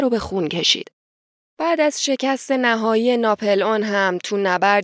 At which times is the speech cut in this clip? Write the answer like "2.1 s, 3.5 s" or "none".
1.5 s